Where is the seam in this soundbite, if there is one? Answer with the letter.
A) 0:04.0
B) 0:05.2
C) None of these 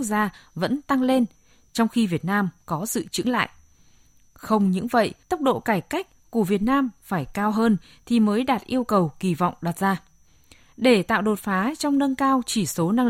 B